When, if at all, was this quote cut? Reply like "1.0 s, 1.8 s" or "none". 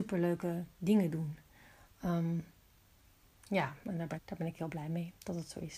4.2 s